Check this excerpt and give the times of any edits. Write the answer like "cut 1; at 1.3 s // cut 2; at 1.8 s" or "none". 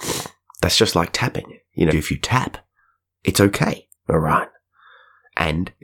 cut 1; at 1.9 s // cut 2; at 4.0 s